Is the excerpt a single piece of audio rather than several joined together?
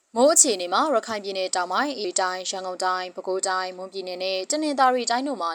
no; 1 cut; at 2.0 s

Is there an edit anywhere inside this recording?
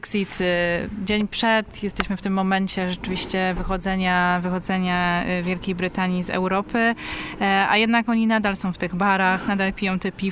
no; 0 cuts

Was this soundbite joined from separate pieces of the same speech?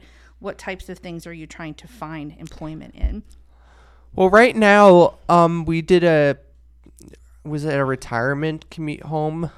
no; 0 cuts

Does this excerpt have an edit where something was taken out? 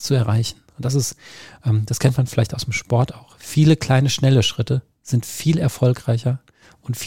no; 0 cuts

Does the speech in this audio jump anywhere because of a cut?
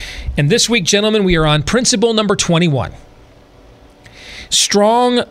no; 0 cuts

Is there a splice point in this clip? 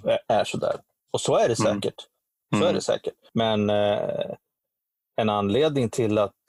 no; 0 cuts

